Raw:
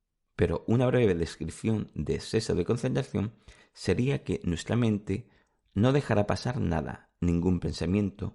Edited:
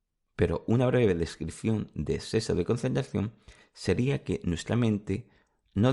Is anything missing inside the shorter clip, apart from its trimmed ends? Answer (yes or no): no